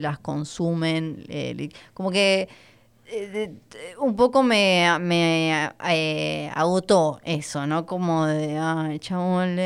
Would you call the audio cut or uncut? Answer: uncut